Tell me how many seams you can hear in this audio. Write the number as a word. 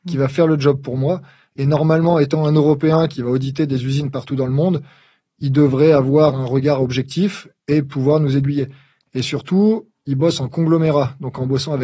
zero